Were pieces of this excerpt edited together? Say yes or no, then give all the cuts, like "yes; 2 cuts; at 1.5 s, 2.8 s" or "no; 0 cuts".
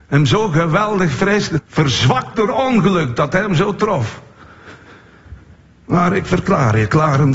yes; 1 cut; at 1.6 s